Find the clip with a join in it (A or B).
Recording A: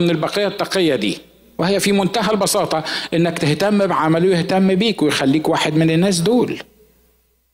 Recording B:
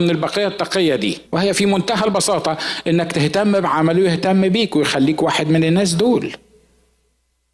B